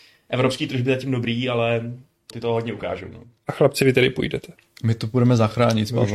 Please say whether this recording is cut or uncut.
cut